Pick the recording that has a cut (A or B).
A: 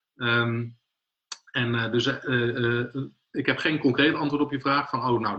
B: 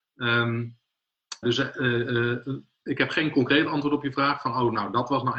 B